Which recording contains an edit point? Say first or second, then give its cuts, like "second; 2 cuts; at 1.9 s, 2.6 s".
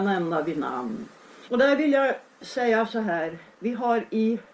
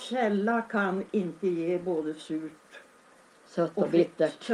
first; 1 cut; at 1.5 s